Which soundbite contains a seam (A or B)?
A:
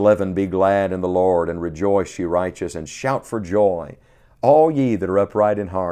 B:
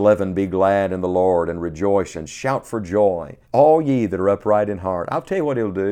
B